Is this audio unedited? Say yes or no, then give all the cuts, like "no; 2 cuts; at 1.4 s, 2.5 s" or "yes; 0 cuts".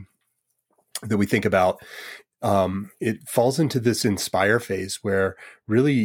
yes; 0 cuts